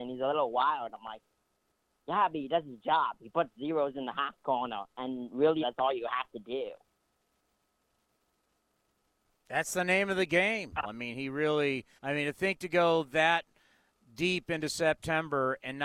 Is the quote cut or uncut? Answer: cut